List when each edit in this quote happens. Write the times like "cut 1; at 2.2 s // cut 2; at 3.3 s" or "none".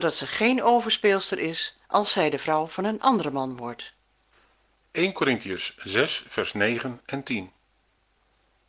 cut 1; at 1.8 s // cut 2; at 4.7 s